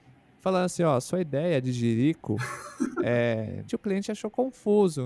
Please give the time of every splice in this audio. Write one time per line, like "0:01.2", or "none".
0:03.7